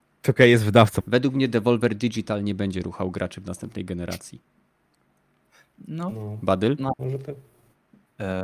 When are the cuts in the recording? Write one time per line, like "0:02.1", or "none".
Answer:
0:01.0

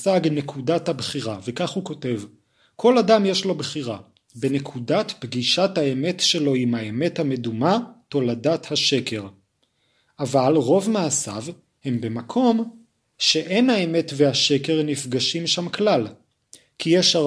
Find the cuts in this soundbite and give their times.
none

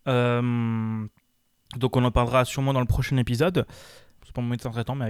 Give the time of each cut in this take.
0:04.2

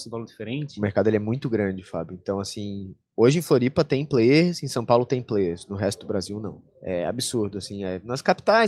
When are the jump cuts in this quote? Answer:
0:06.7

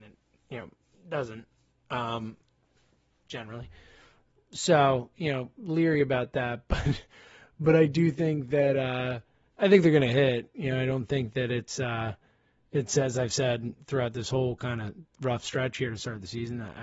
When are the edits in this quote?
none

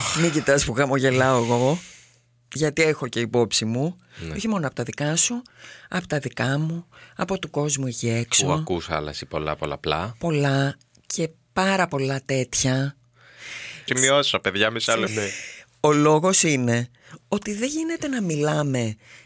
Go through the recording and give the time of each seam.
0:13.9
0:15.1

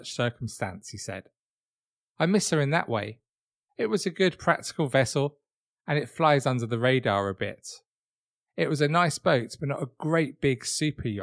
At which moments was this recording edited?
0:03.7

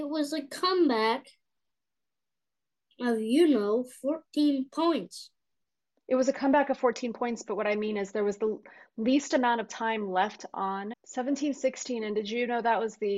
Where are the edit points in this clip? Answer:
0:10.9

